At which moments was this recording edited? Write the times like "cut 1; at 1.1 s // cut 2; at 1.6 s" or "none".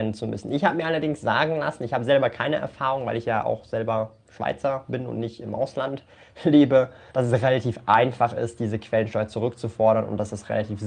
cut 1; at 7.1 s

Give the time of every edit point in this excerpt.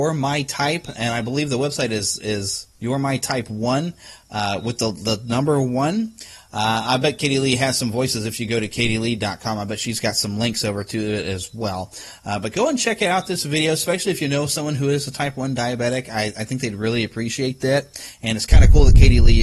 cut 1; at 2.7 s

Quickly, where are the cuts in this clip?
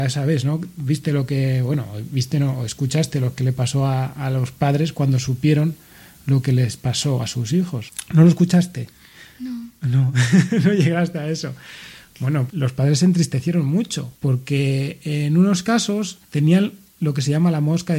cut 1; at 12.5 s // cut 2; at 16.2 s

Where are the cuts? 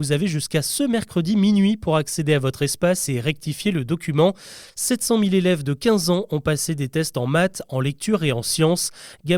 cut 1; at 4.7 s

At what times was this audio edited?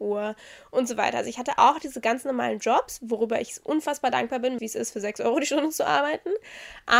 cut 1; at 4.6 s

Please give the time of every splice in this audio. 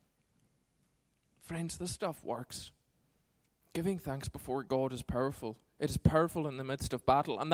none

